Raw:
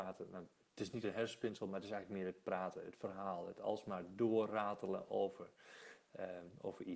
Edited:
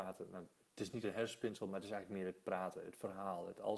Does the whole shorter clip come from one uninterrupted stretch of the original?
yes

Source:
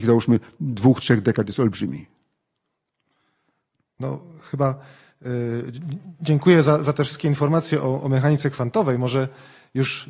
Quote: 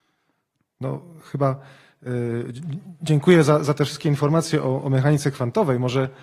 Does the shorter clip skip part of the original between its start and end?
no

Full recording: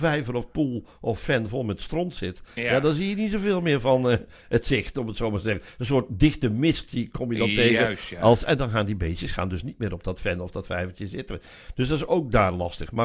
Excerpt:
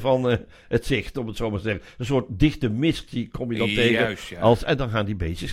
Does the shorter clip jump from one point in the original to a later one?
no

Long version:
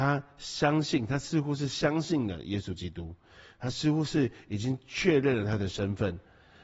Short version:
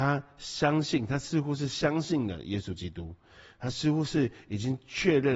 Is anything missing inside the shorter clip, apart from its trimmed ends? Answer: no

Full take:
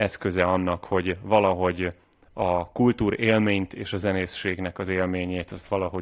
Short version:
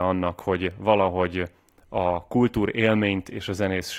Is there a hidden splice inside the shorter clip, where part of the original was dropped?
no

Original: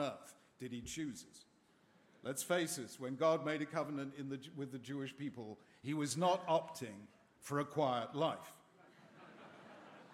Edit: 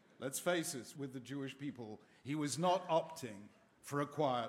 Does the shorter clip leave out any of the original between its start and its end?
yes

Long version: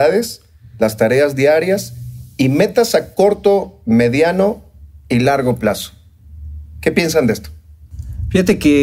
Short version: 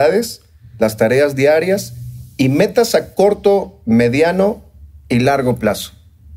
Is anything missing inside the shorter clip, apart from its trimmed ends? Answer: no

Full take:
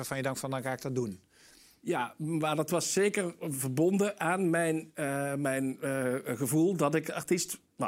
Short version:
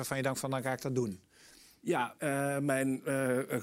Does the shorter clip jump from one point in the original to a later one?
yes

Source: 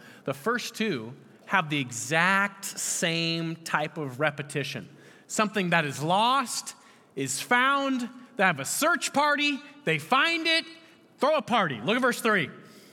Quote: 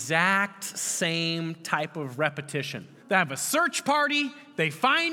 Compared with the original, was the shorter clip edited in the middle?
yes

